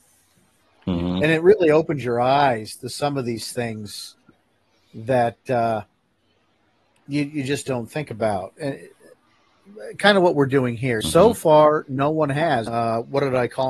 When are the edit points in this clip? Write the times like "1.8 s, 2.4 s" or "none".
11.0 s, 12.7 s